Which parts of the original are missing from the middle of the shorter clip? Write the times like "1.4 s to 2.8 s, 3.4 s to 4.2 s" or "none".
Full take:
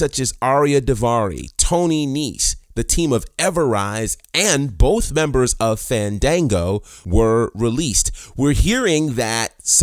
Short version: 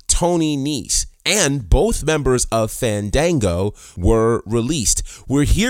2.7 s to 4.2 s